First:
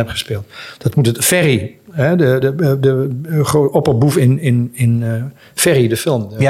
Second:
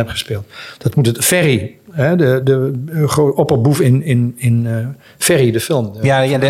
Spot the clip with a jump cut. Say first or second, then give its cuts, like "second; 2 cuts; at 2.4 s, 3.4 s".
second; 1 cut; at 2.4 s